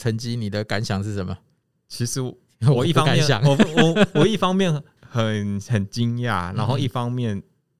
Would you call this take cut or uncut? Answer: uncut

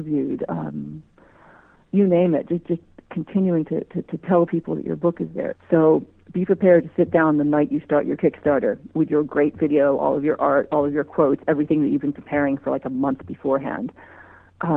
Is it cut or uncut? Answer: cut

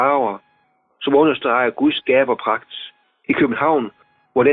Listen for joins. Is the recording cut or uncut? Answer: cut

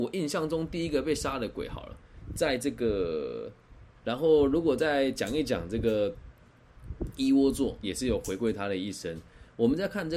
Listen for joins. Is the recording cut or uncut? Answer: cut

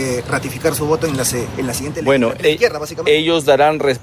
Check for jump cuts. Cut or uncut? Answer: cut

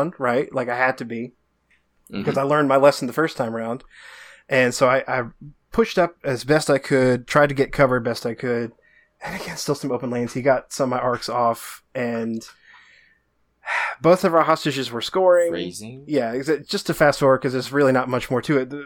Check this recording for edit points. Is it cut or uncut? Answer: uncut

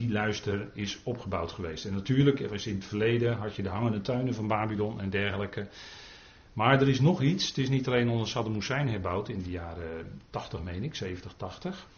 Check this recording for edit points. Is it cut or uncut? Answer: uncut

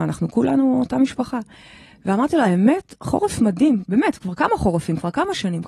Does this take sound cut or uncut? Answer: uncut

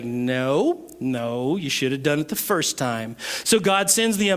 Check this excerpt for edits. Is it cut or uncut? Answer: uncut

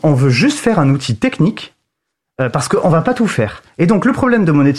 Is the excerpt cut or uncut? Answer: uncut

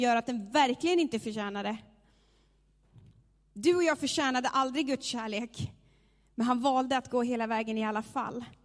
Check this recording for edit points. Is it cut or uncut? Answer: uncut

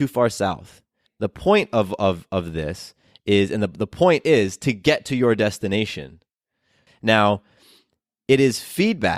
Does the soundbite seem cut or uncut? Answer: cut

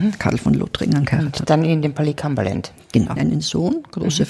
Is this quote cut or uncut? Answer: cut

